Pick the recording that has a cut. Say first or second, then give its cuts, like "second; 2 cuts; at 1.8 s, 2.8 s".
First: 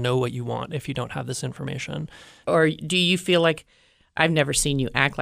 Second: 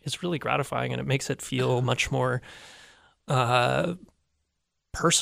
first; 1 cut; at 2.4 s